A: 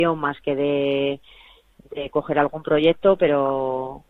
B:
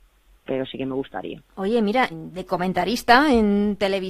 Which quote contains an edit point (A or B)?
B